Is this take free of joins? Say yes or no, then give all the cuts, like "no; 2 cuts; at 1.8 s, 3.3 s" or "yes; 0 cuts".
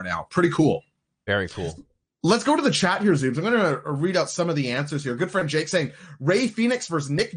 yes; 0 cuts